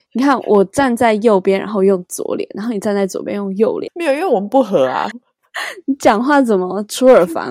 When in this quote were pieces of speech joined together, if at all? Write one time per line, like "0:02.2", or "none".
0:03.9
0:05.1